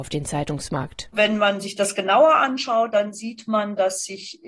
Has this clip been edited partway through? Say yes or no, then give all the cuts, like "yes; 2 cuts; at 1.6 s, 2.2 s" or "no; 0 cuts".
no; 0 cuts